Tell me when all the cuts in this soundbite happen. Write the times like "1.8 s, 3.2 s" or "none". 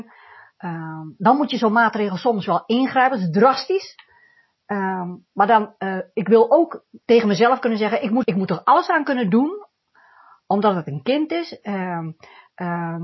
7.0 s, 8.2 s